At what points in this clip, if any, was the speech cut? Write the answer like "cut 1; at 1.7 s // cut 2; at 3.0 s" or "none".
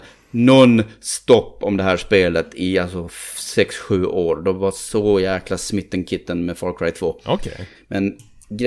cut 1; at 7.7 s